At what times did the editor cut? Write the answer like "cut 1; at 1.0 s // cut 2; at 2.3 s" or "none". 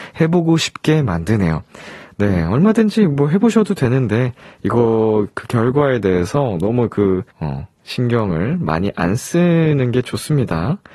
cut 1; at 7.3 s